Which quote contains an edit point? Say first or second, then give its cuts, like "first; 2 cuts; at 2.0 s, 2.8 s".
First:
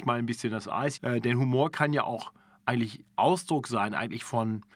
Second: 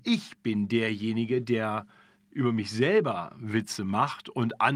first; 1 cut; at 1.0 s